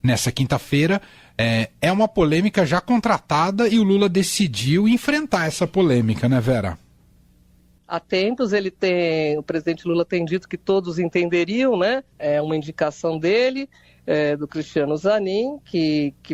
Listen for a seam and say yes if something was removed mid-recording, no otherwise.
yes